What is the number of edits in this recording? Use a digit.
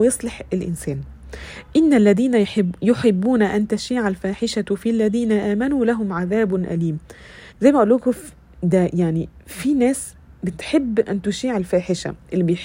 1